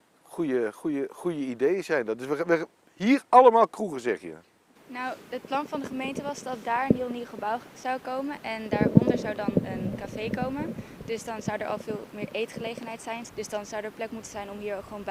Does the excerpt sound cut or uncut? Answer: cut